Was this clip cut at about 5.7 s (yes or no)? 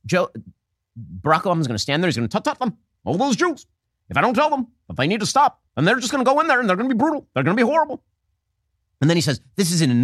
yes